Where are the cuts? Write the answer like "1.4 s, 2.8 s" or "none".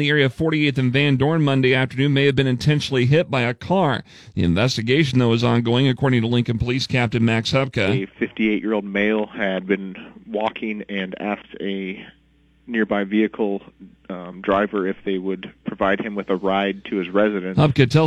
none